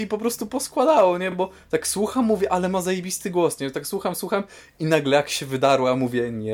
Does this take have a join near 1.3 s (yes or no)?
no